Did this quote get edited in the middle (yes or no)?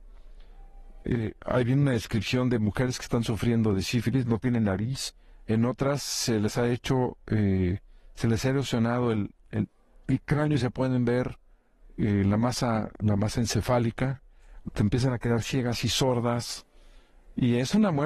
yes